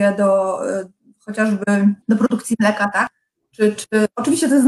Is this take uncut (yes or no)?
no